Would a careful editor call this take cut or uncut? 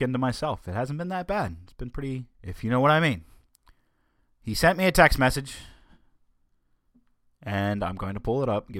cut